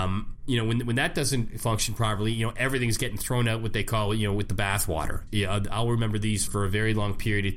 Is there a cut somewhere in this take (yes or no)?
yes